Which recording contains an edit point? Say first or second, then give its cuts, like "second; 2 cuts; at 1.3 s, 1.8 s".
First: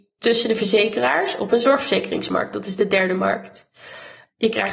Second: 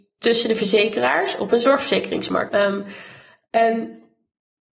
second; 1 cut; at 2.5 s